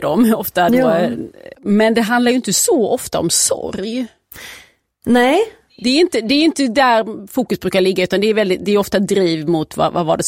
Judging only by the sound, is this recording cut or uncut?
cut